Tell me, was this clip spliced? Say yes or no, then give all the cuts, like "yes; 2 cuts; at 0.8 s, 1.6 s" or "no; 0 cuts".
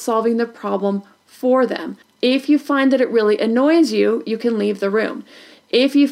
yes; 1 cut; at 2.0 s